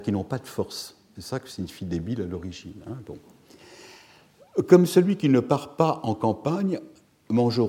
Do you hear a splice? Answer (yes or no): yes